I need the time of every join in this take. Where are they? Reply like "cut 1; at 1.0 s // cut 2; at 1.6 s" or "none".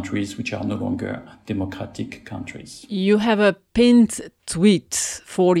none